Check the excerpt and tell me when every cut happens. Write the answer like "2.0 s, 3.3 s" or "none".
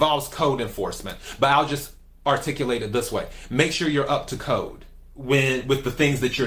none